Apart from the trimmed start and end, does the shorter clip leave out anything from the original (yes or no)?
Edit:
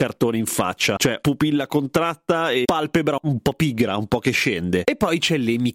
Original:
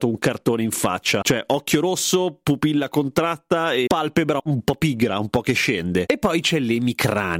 yes